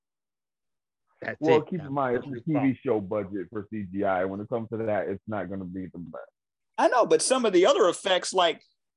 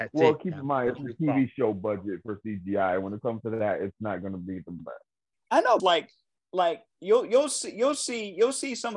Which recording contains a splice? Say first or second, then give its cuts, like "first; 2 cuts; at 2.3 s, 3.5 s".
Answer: second; 1 cut; at 5.8 s